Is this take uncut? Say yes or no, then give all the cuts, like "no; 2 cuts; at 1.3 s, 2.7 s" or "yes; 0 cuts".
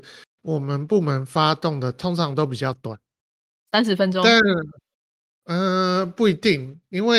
yes; 0 cuts